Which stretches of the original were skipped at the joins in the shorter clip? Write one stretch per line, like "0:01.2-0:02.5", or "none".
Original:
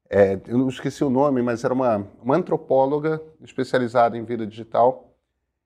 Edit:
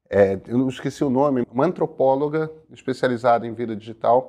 0:01.4-0:02.1